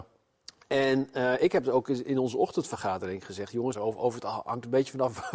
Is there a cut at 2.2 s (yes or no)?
no